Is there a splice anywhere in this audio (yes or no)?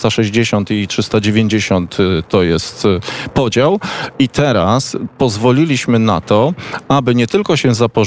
no